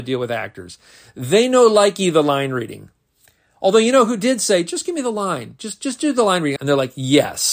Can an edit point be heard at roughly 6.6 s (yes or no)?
yes